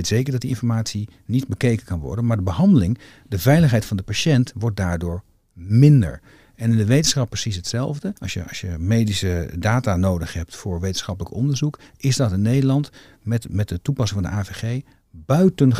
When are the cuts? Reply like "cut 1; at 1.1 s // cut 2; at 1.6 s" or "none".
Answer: cut 1; at 8.2 s